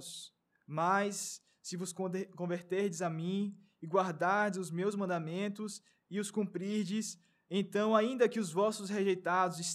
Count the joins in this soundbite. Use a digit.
0